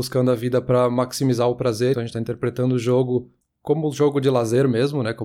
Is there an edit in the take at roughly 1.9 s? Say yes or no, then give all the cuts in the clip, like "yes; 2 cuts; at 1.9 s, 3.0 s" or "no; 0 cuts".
yes; 1 cut; at 1.9 s